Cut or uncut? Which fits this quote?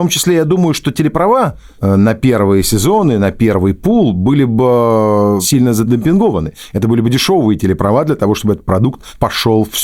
uncut